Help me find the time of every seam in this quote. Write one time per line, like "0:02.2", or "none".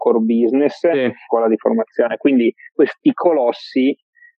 0:01.3